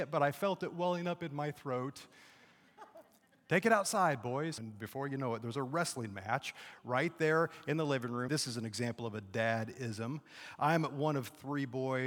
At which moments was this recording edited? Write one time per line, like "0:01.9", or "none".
0:04.6
0:08.3